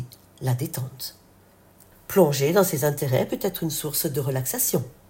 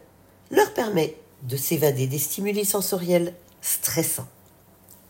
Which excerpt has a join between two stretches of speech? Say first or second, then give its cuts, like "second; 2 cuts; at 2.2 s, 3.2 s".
first; 1 cut; at 1.9 s